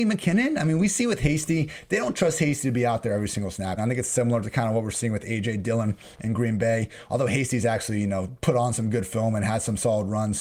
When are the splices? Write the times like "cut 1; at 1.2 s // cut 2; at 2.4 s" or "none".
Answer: cut 1; at 3.8 s